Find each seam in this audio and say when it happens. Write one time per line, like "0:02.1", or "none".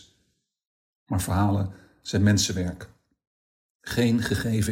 0:00.9